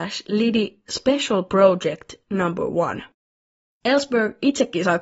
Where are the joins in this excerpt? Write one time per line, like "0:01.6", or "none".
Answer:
0:03.7